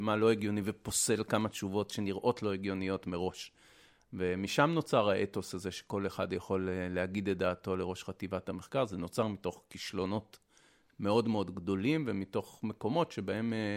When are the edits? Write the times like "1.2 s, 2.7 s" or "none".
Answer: none